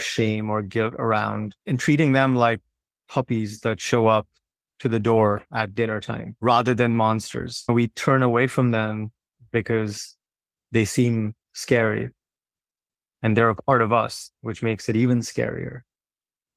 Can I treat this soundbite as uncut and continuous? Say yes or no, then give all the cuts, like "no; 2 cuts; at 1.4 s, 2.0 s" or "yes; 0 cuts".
yes; 0 cuts